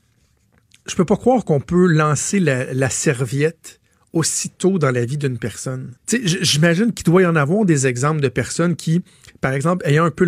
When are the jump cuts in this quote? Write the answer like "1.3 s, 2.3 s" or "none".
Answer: 6.0 s